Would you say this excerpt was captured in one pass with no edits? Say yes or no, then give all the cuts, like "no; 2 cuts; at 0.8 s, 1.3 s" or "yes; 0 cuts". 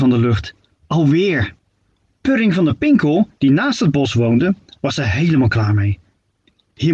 yes; 0 cuts